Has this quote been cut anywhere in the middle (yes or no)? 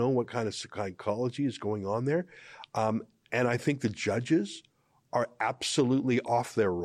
no